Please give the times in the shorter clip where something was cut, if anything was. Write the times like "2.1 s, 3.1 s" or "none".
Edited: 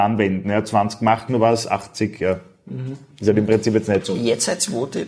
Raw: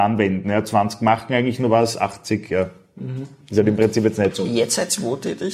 1.3 s